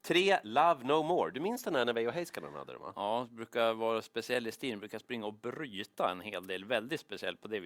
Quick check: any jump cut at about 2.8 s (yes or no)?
no